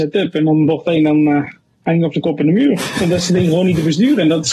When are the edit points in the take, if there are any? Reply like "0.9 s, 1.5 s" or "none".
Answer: none